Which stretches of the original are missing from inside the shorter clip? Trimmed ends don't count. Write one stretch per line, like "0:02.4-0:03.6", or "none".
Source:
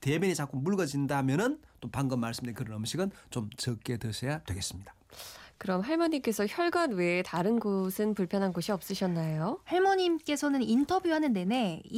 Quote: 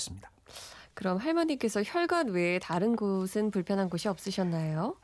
none